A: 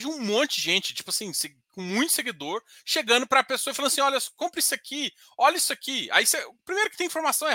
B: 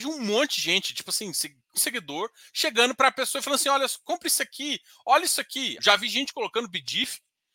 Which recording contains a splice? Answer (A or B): B